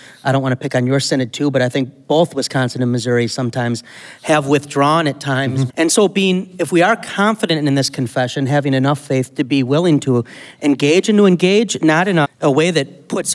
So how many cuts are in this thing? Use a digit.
2